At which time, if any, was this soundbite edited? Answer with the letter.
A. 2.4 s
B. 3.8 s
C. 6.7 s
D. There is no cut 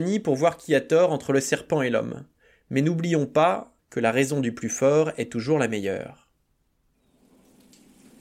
B